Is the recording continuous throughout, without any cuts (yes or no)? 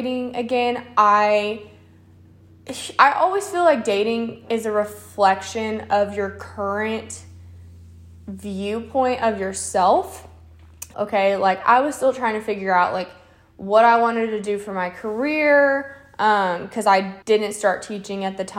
no